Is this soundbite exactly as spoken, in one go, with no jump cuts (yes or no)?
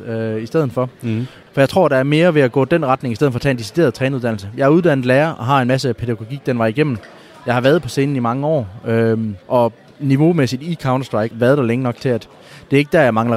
no